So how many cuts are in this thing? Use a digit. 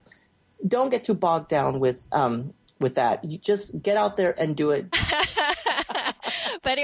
1